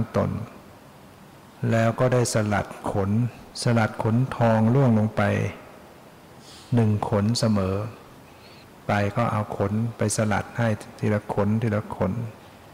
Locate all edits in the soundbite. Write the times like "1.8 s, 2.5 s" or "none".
3.5 s